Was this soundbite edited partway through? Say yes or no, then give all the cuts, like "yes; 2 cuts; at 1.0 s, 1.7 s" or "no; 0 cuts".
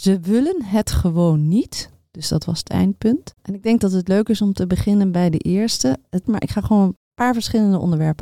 yes; 2 cuts; at 3.4 s, 6.2 s